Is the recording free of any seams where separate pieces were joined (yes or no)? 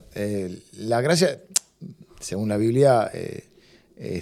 yes